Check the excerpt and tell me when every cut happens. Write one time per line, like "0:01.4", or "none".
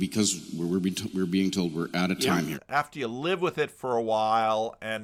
0:02.5